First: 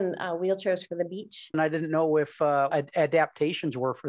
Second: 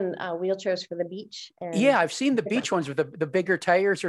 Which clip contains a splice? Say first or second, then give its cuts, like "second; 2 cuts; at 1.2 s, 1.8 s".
first; 2 cuts; at 1.5 s, 2.7 s